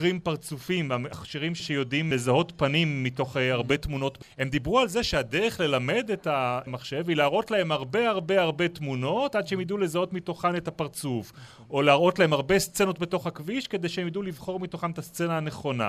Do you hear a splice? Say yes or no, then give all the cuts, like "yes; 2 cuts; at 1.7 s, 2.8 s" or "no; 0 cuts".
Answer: no; 0 cuts